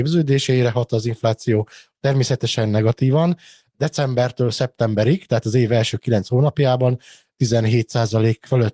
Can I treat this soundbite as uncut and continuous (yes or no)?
no